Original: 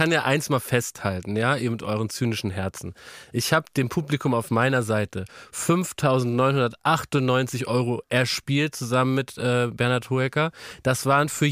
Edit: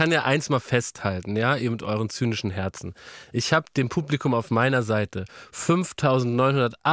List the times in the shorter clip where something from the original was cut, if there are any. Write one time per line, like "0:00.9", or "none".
none